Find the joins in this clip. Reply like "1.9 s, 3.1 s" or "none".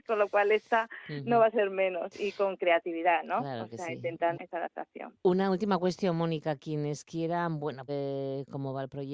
4.3 s, 7.9 s